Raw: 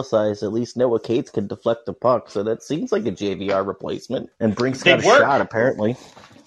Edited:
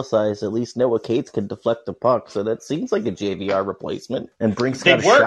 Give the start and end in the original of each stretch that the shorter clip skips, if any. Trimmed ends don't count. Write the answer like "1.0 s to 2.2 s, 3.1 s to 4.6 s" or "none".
none

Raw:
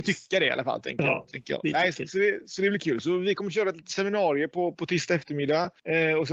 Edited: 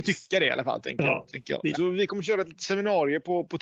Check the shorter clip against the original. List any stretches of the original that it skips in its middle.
1.7 s to 3.0 s

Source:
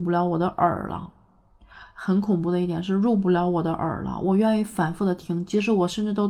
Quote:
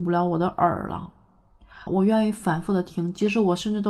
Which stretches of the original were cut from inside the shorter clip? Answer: 1.9 s to 4.2 s

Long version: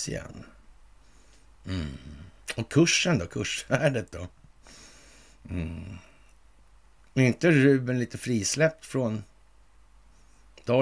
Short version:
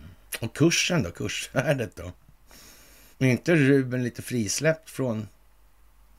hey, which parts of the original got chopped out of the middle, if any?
5.3 s to 7.1 s

